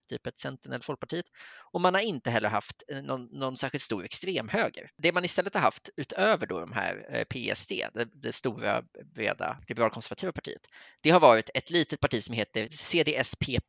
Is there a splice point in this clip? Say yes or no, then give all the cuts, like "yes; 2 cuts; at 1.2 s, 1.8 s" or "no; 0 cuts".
no; 0 cuts